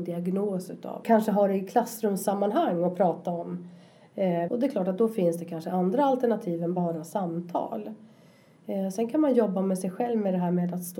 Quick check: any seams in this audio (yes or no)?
yes